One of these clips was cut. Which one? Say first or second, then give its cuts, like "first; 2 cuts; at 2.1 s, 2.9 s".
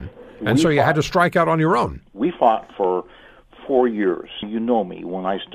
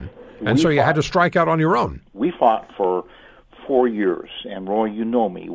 first; 1 cut; at 4.4 s